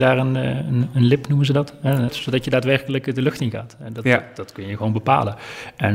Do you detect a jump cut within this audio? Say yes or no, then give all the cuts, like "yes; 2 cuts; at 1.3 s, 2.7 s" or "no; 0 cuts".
yes; 1 cut; at 2.1 s